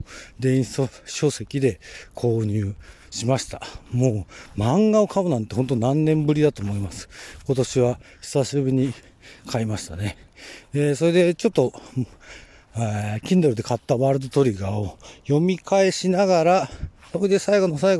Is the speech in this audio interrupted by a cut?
no; 0 cuts

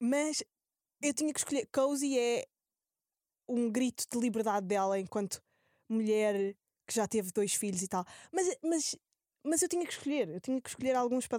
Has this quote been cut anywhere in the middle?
no; 0 cuts

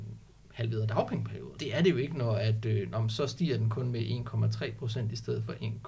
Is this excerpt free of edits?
no; 1 cut; at 1.6 s

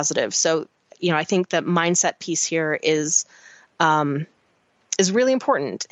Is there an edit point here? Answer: no; 0 cuts

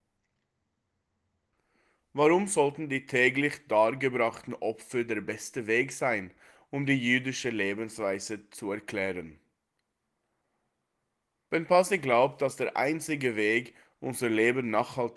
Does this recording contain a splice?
no; 0 cuts

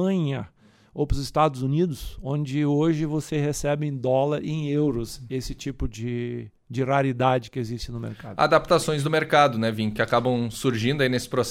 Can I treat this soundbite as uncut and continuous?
yes; 0 cuts

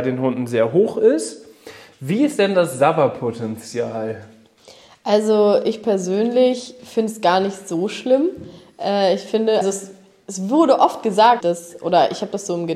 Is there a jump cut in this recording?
yes; 2 cuts; at 9.6 s, 11.4 s

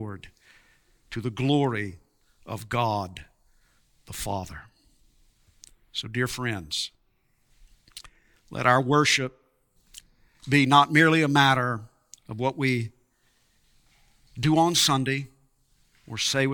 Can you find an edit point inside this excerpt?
no; 0 cuts

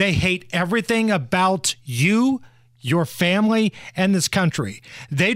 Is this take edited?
no; 0 cuts

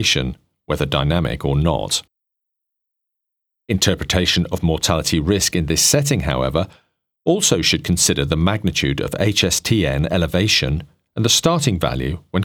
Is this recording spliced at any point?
no; 0 cuts

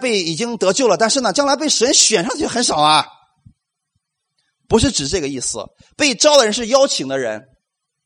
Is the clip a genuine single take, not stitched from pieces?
yes; 0 cuts

